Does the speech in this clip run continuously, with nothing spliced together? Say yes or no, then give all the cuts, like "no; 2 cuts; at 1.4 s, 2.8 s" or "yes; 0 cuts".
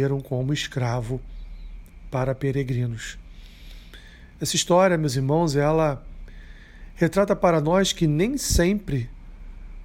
yes; 0 cuts